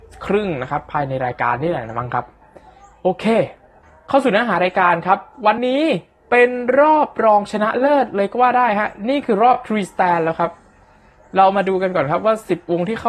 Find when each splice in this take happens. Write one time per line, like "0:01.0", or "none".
0:05.6